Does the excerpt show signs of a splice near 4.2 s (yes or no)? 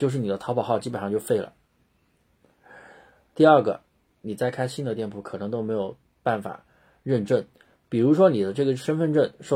yes